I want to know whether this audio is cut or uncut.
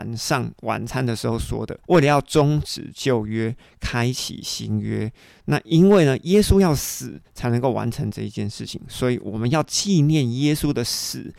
cut